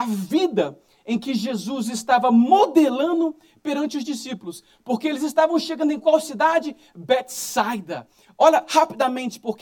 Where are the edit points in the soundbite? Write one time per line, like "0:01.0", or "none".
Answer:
0:08.2